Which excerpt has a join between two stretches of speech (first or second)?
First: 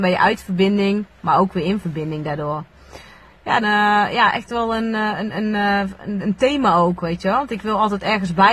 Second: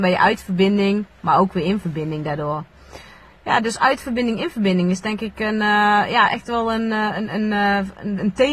first